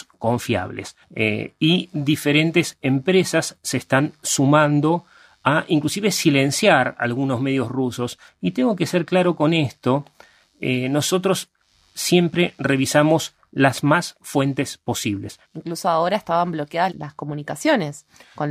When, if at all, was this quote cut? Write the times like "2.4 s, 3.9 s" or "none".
1.0 s, 15.4 s, 16.9 s